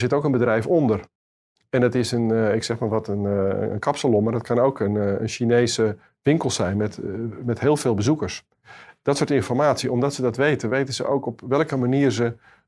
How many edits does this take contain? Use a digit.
0